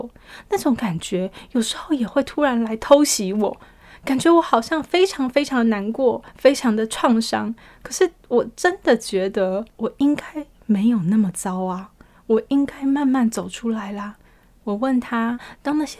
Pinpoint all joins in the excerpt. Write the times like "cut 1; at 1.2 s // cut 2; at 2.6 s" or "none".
none